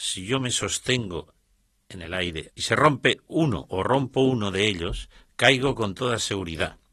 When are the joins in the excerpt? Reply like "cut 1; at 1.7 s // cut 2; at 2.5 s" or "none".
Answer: cut 1; at 2.5 s